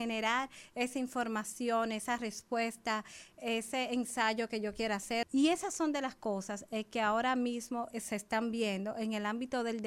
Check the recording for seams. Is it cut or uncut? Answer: cut